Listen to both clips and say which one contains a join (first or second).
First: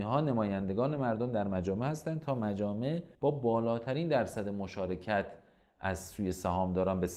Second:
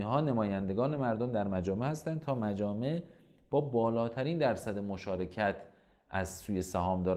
first